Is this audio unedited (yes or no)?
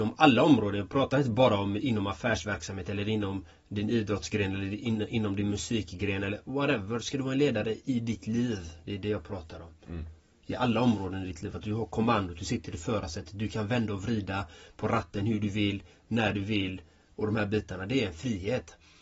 yes